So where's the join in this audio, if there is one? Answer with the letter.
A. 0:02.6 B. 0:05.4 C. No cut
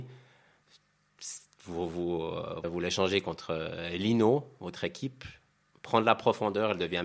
A